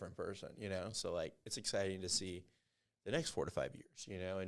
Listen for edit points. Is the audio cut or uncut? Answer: uncut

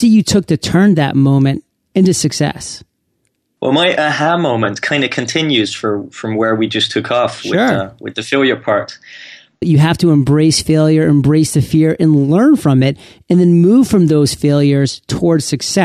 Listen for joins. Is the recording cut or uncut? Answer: cut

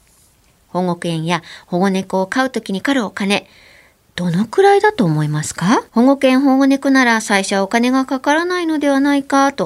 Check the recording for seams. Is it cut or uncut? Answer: cut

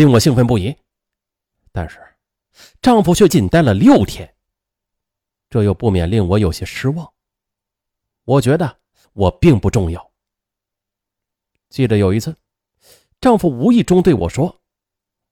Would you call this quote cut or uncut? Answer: cut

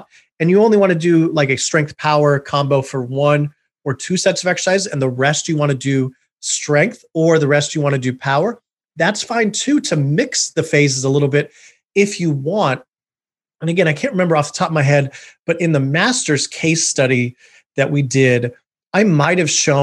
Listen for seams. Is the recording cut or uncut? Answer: uncut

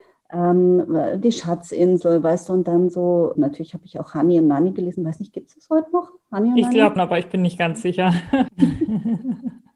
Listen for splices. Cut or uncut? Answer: cut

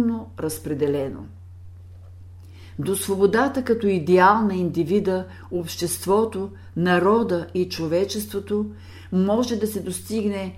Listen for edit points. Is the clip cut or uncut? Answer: uncut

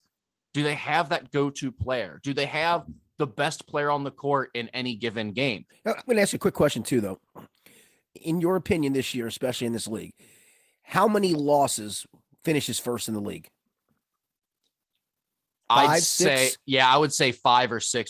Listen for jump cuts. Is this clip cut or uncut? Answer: cut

